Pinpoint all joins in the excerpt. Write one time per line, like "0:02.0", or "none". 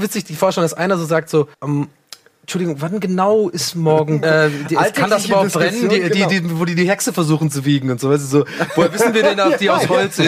0:01.5
0:04.2

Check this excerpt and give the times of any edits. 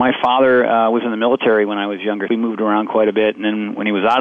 0:02.3

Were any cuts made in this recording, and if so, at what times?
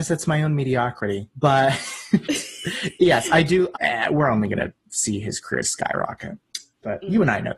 0:03.7
0:05.6

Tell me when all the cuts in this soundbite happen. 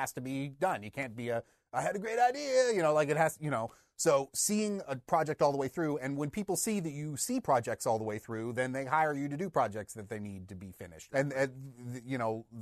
0:11.1

